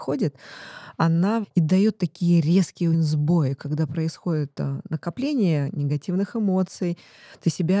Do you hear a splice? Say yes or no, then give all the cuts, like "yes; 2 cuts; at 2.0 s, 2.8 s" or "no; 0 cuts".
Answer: yes; 2 cuts; at 1.4 s, 2.9 s